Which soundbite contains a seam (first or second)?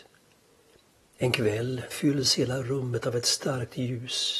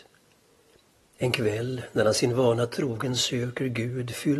first